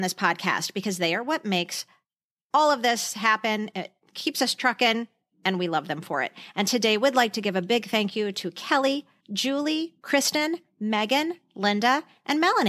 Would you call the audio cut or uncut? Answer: cut